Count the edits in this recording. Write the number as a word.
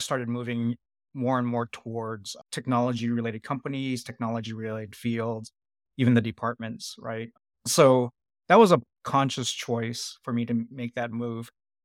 zero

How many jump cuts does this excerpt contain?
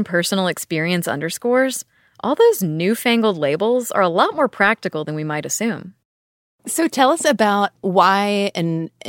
zero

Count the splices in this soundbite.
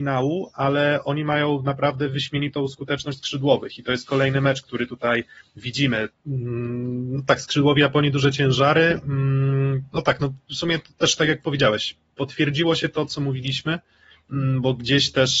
one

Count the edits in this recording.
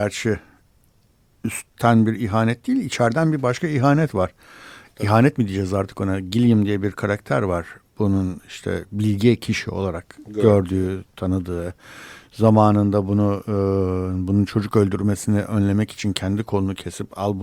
zero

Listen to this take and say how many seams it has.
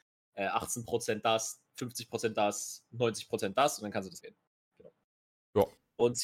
one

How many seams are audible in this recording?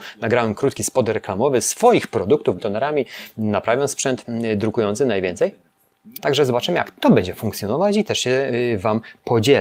two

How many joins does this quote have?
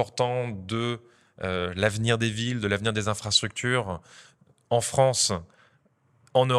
zero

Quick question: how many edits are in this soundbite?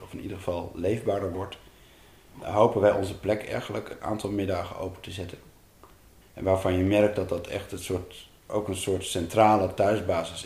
two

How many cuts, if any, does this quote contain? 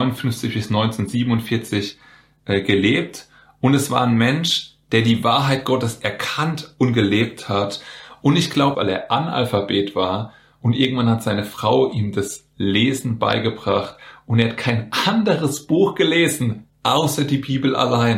two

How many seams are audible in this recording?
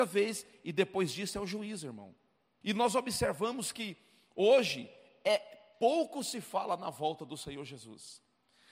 one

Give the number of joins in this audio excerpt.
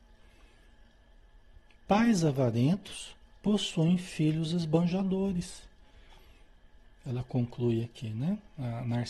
zero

